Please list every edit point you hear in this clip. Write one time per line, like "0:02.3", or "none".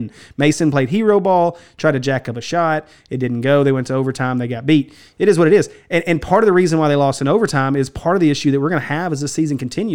none